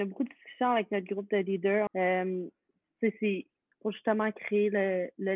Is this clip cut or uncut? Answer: cut